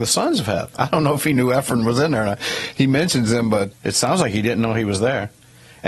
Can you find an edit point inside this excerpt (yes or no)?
yes